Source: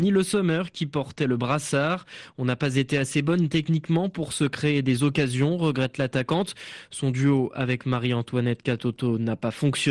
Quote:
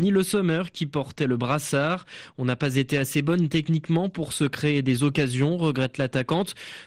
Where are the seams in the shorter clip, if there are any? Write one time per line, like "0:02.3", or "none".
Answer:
none